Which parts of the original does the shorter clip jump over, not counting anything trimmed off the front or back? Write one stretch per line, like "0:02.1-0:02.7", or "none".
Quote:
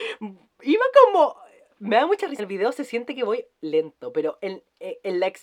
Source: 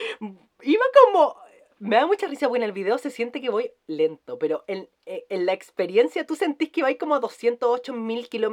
0:02.4-0:02.6

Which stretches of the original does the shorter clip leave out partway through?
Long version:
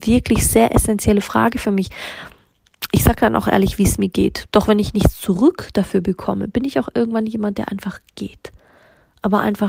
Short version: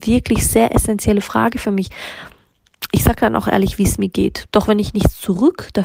none

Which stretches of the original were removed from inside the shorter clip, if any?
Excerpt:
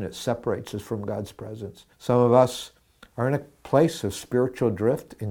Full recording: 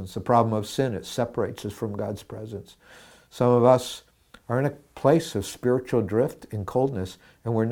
0:02.8-0:03.2

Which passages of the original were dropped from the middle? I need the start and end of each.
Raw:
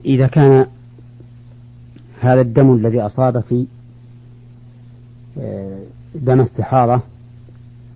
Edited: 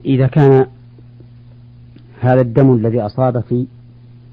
none

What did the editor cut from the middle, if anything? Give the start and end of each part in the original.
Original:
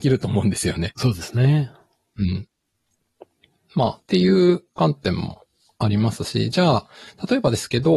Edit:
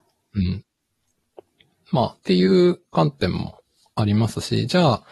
none

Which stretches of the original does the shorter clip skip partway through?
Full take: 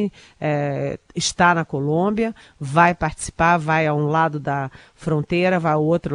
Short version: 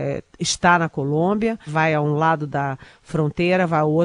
0:02.4-0:03.6

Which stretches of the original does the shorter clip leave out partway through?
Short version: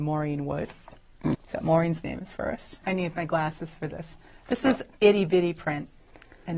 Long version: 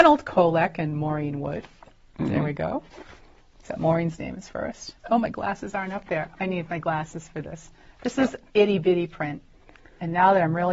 0:02.3-0:03.5
0:05.0-0:06.4

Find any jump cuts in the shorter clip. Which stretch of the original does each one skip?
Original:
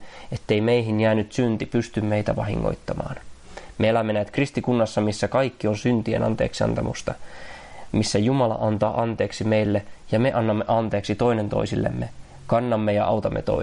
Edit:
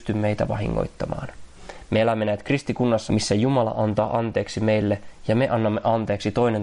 0:04.9-0:07.9

